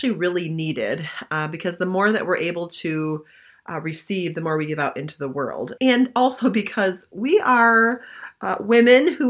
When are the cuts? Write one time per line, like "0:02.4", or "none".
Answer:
0:05.8